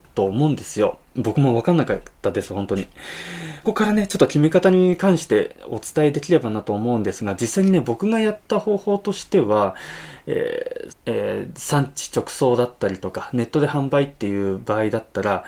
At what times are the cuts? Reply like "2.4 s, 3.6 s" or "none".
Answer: 3.6 s, 10.9 s